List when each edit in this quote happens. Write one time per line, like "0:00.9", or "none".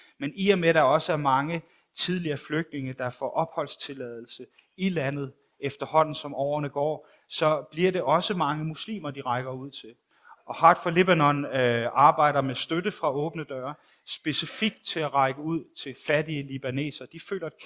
0:10.4